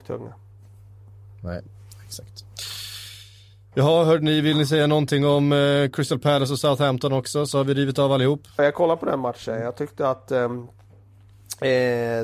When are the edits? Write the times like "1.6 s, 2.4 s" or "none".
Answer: 8.6 s

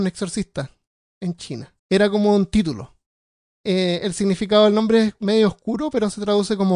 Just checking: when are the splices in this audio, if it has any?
1.8 s

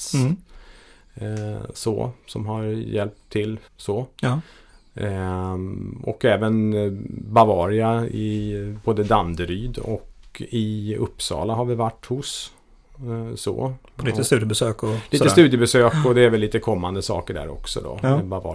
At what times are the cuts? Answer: 3.7 s

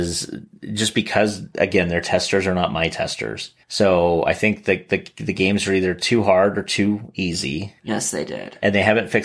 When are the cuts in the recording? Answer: 3.6 s, 7.8 s

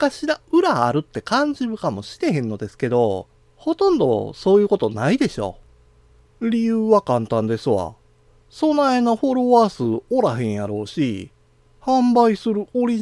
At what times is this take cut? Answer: 6.3 s

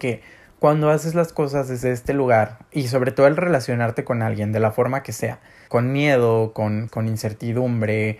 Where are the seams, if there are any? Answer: 5.7 s, 6.9 s

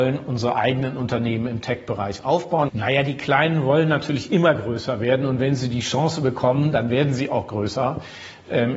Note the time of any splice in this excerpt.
2.7 s

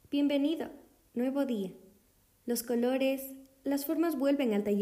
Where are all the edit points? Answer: none

